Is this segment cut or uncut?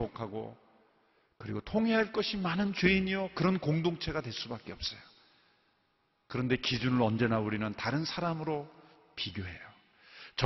uncut